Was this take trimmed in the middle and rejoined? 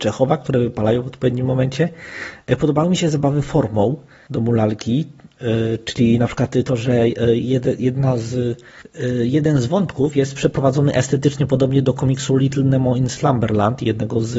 no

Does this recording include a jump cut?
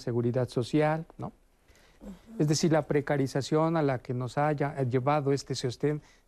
yes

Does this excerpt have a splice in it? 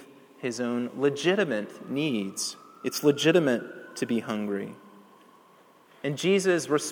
no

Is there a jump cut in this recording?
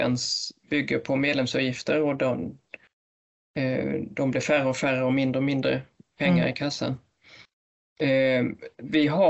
no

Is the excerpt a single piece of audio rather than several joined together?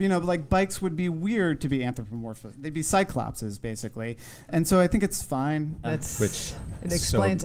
no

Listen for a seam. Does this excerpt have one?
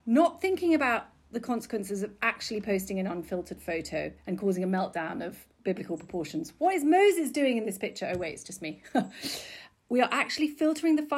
no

